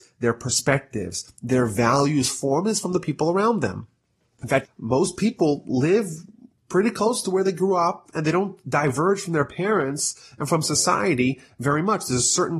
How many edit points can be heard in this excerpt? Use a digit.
1